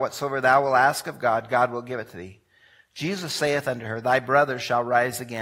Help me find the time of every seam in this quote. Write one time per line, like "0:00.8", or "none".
none

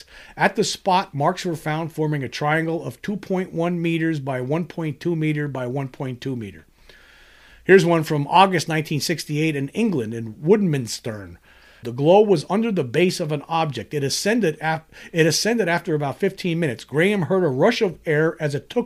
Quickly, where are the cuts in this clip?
0:11.8

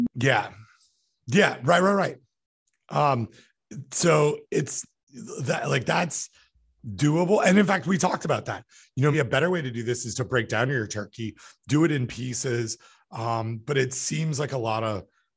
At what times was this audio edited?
0:09.1

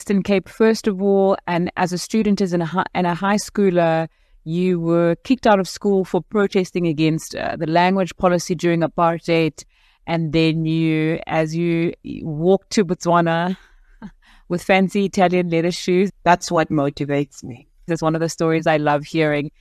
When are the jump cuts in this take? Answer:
0:12.0
0:16.1
0:17.9

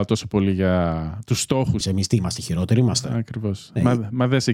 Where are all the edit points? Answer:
0:01.8

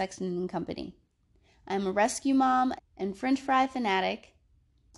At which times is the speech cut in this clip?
0:02.8

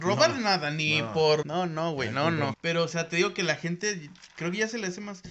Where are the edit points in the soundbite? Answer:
0:01.4
0:02.5

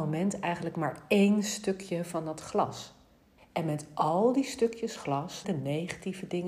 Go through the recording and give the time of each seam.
0:03.4
0:05.4

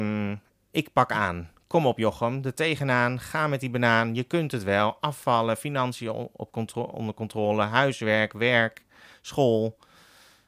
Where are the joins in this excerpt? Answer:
none

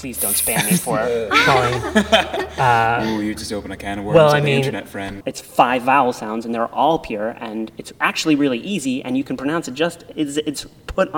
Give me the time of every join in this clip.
0:05.2

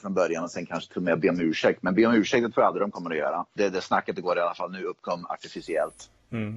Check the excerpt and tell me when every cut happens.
0:03.6

